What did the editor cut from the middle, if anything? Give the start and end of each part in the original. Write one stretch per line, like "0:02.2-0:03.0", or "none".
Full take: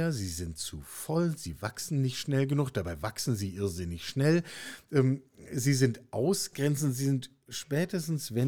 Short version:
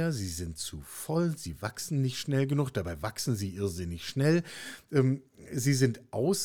none

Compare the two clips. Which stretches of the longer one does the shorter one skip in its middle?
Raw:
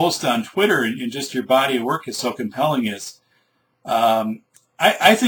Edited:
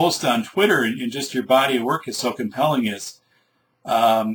none

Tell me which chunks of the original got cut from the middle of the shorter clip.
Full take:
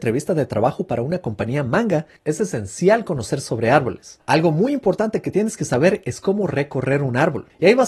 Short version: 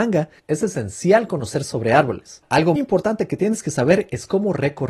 0:04.5-0:04.7

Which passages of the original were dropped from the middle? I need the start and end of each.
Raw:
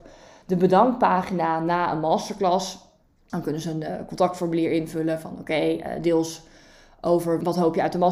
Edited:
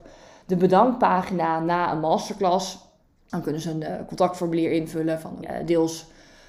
0:05.4-0:05.8

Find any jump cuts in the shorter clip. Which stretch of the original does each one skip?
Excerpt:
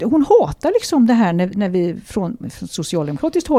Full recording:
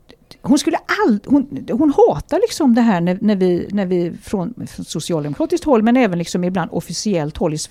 0:03.2-0:03.7

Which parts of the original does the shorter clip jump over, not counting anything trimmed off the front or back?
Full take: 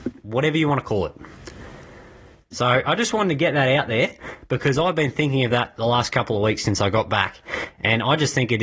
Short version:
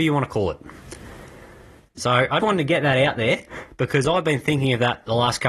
0:03.0-0:03.1

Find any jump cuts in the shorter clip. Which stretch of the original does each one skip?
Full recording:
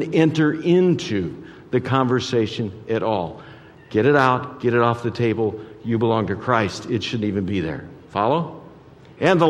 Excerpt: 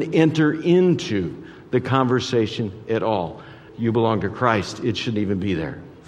0:03.7-0:05.8

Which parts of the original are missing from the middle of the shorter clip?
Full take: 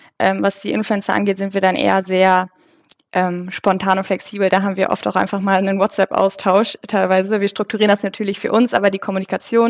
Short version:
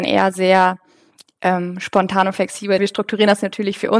0:04.5-0:07.4

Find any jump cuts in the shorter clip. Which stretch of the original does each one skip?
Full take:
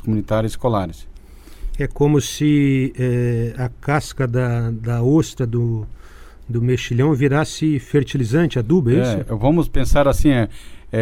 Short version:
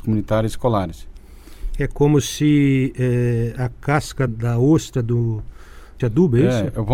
0:04.3-0:04.7
0:06.4-0:08.5

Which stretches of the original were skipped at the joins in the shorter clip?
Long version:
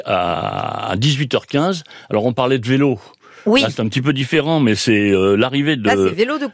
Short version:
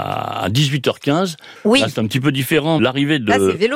0:02.0-0:03.4
0:04.6-0:05.4

